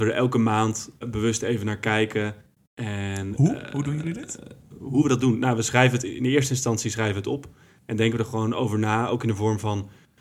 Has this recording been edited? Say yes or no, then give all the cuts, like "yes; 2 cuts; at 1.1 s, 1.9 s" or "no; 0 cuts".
yes; 1 cut; at 1.0 s